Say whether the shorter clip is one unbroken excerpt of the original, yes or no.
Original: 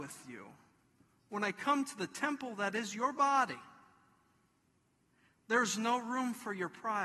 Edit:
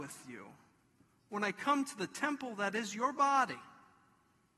yes